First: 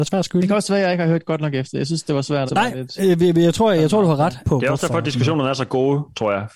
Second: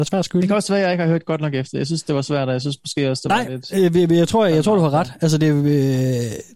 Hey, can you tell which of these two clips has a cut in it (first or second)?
first